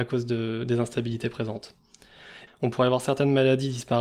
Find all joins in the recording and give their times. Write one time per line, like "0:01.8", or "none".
0:02.5

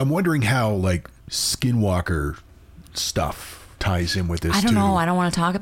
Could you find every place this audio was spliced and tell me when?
0:01.2
0:03.7

